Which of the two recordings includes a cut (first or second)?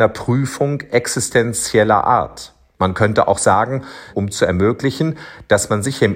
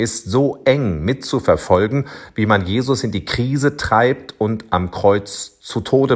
first